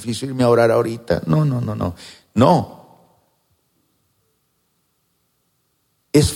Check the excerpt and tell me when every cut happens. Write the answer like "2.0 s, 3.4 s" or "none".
1.6 s